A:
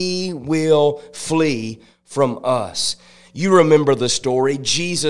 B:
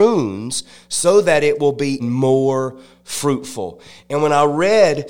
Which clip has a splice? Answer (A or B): B